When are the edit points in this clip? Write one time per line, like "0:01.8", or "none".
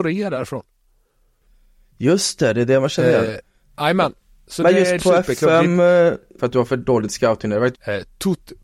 0:05.0
0:06.4
0:07.7